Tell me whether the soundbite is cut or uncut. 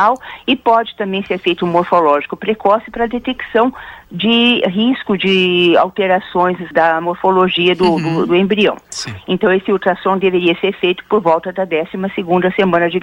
uncut